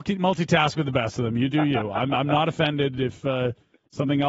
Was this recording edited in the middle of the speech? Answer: no; 0 cuts

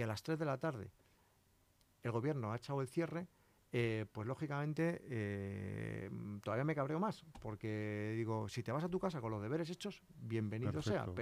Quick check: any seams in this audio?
no; 0 cuts

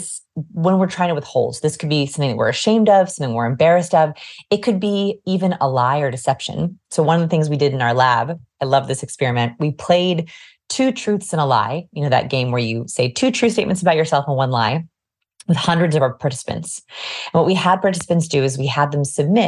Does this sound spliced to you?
no; 0 cuts

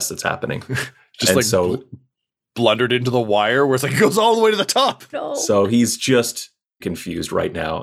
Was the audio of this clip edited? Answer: yes; 2 cuts; at 5.1 s, 6.8 s

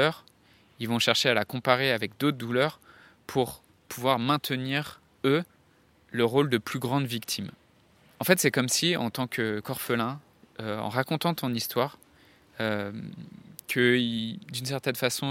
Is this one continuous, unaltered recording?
yes; 0 cuts

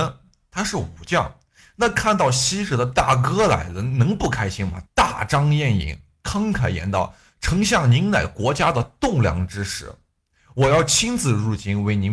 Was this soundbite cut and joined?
yes; 1 cut; at 4.9 s

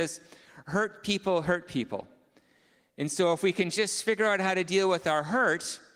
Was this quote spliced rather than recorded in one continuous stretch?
no; 0 cuts

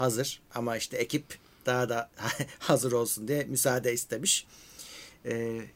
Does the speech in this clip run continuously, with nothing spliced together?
yes; 0 cuts

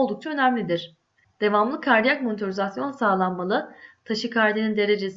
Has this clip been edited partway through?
yes; 1 cut; at 1.2 s

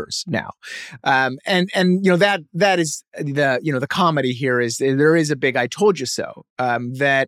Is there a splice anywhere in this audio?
no; 0 cuts

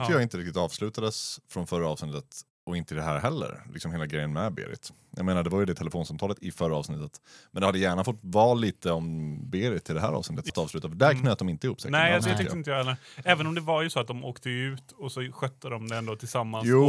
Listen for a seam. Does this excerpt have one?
yes; 1 cut; at 10.5 s

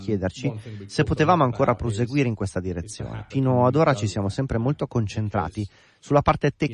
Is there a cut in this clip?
yes; 1 cut; at 3.3 s

